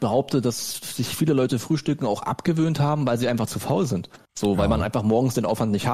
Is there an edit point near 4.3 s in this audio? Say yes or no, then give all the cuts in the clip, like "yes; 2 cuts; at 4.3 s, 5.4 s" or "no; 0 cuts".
yes; 1 cut; at 4.3 s